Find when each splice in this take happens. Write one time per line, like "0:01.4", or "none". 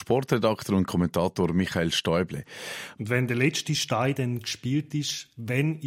0:03.0